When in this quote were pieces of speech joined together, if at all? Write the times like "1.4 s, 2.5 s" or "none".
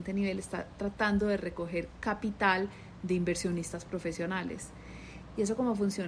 none